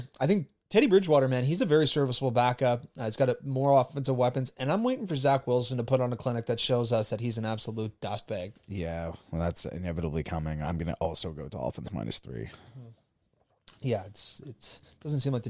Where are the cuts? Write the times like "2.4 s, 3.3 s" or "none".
none